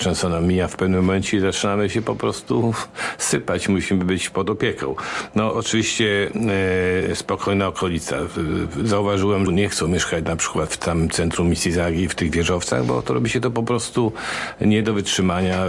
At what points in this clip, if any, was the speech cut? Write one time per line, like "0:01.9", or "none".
0:09.5